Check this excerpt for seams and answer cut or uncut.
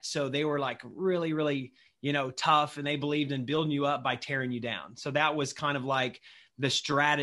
uncut